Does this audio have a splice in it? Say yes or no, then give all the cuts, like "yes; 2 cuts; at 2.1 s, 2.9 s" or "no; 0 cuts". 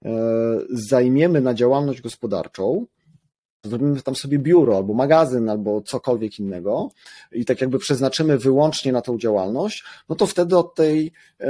yes; 1 cut; at 3.6 s